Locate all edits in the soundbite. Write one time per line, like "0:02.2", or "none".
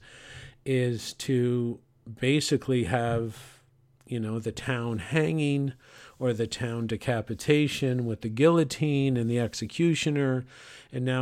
none